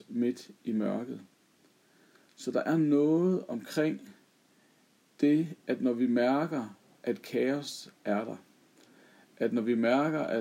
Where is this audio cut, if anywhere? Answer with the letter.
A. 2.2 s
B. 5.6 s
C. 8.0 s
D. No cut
D